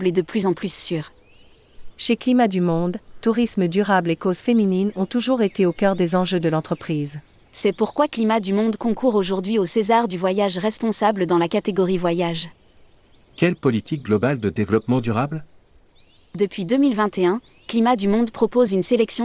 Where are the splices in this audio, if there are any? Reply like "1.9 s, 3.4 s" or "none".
1.9 s